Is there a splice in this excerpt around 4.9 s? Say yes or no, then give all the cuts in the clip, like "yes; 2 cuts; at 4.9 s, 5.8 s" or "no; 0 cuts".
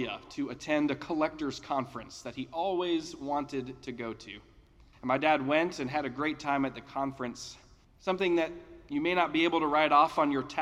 yes; 2 cuts; at 4.9 s, 7.8 s